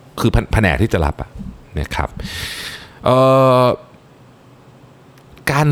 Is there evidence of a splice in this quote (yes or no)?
no